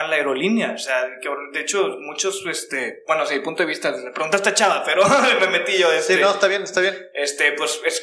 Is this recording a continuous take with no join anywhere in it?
yes; 0 cuts

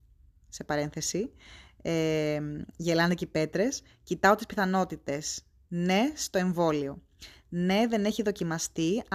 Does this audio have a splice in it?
no; 0 cuts

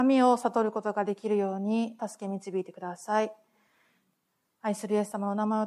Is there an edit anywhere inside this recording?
yes; 1 cut; at 2.0 s

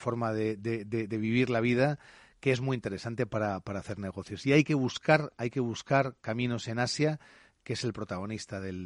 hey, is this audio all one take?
yes; 0 cuts

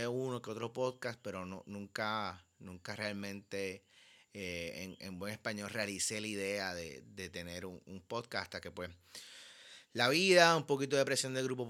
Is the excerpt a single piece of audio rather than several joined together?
yes; 0 cuts

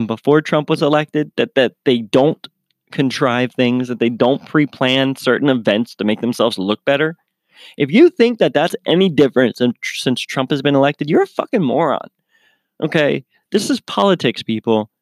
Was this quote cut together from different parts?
no; 0 cuts

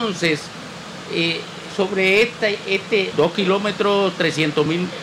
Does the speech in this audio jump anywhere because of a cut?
yes; 2 cuts; at 1.7 s, 3.1 s

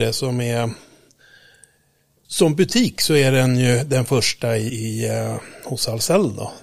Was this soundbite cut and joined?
yes; 1 cut; at 4.7 s

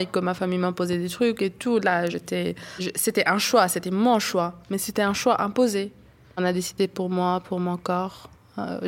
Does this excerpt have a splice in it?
no; 0 cuts

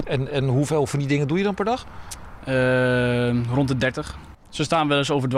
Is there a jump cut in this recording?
yes; 1 cut; at 4.3 s

